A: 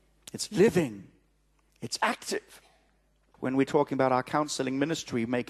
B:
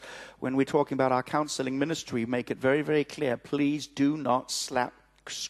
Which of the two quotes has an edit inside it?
A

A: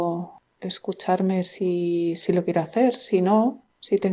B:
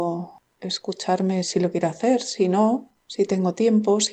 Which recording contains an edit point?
B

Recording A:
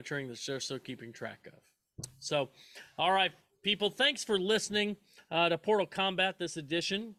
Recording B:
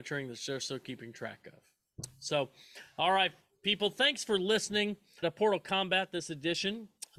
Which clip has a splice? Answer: B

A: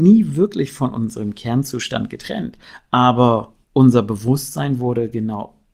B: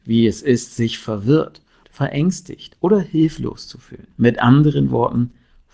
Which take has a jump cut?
B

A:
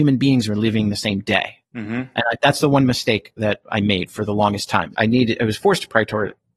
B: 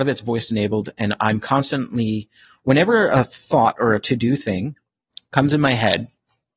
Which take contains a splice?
A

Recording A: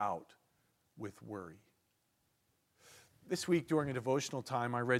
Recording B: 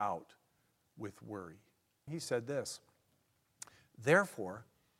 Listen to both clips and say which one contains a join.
B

